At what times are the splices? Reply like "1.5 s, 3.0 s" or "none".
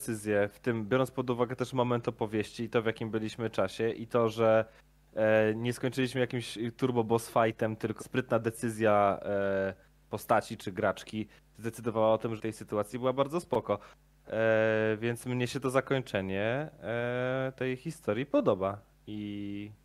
8.0 s, 12.4 s